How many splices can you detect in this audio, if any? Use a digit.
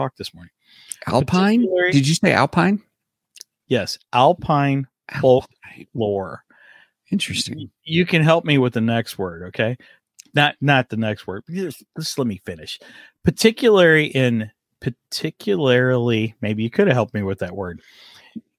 0